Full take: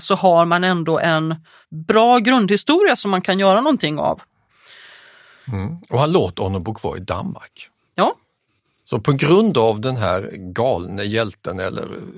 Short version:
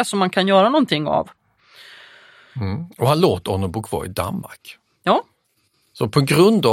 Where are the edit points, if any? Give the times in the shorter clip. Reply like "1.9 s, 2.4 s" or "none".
none